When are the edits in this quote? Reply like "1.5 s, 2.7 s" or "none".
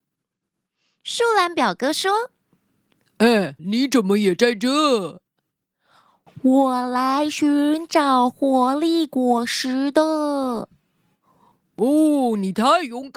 3.6 s